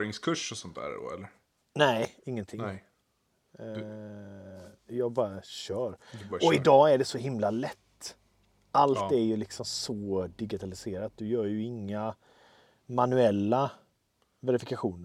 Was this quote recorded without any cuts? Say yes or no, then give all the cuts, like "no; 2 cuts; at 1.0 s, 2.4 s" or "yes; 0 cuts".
yes; 0 cuts